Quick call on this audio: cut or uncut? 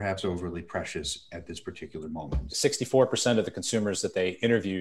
cut